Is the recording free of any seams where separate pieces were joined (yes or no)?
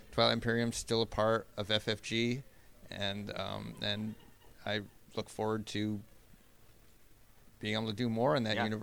yes